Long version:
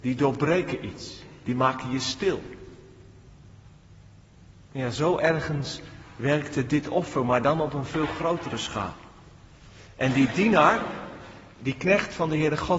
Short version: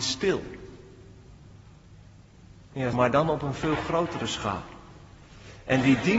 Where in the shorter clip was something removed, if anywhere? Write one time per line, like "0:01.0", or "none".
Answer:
0:02.9